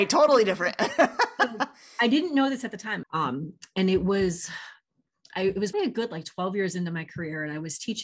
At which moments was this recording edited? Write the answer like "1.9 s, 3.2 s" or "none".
3.0 s, 5.7 s